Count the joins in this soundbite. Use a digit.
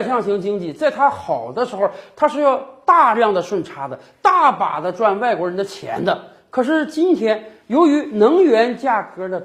0